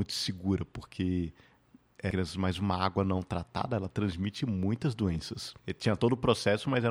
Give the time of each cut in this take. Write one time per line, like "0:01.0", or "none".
0:02.1
0:05.6

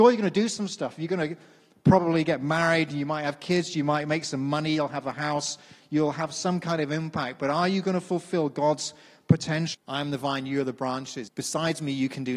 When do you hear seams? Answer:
0:09.7
0:11.3

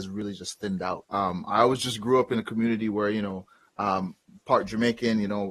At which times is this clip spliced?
0:01.1

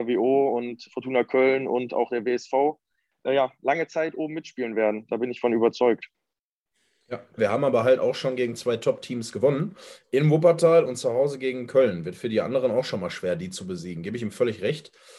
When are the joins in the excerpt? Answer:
0:07.4

